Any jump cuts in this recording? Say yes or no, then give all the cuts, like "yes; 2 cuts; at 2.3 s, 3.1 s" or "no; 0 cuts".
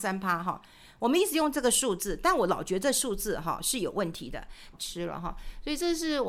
yes; 1 cut; at 4.7 s